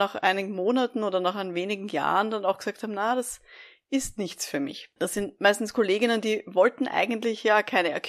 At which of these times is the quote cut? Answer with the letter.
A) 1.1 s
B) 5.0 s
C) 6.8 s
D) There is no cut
B